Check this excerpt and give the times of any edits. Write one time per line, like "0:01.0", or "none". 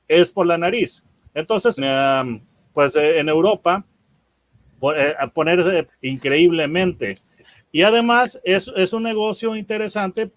0:01.8
0:05.9
0:07.4